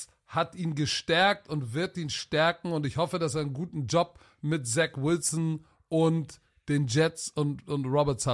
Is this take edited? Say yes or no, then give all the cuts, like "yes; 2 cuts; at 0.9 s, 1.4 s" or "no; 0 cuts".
no; 0 cuts